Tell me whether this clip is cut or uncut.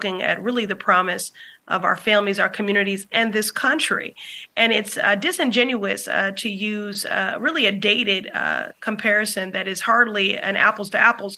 uncut